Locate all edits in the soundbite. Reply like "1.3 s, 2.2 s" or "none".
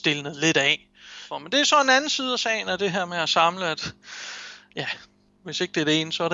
1.3 s